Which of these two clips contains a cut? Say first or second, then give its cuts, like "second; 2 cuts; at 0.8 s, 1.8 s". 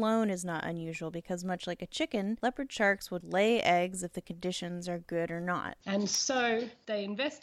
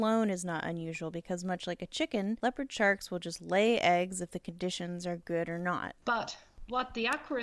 first; 2 cuts; at 3.2 s, 5.8 s